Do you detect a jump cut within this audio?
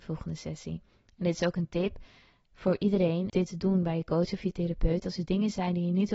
yes; 1 cut; at 3.3 s

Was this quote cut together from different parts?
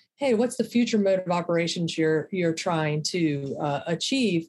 no; 0 cuts

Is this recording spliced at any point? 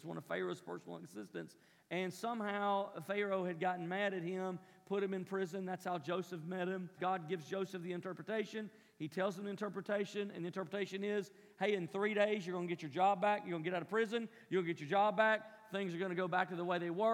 yes; 1 cut; at 7.0 s

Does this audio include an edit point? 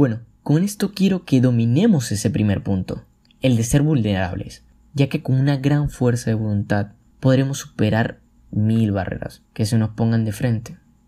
yes; 2 cuts; at 7.1 s, 9.5 s

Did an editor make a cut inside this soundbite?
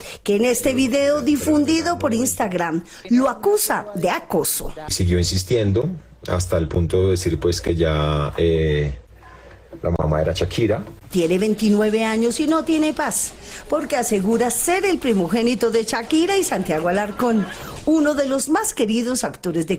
yes; 1 cut; at 11.1 s

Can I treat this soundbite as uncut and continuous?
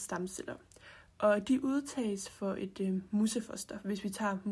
yes; 0 cuts

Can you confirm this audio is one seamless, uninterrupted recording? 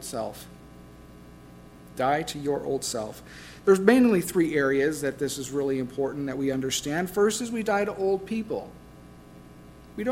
yes; 0 cuts

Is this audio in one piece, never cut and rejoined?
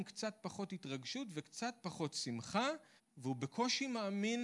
no; 1 cut; at 3.0 s

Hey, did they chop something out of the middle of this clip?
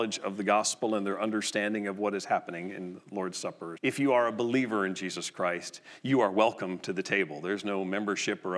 yes; 1 cut; at 3.8 s

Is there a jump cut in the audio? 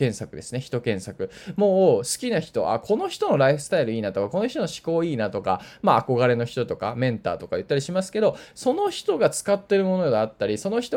no; 0 cuts

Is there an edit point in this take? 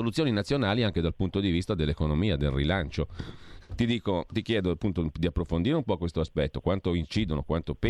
yes; 1 cut; at 3.6 s

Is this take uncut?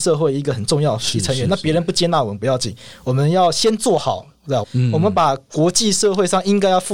no; 1 cut; at 4.6 s

